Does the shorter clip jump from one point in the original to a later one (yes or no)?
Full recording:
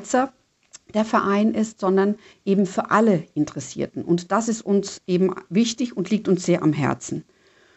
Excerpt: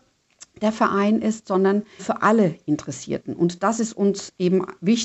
yes